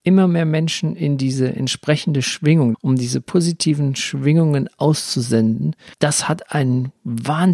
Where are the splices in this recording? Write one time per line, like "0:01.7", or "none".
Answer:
0:02.7
0:05.9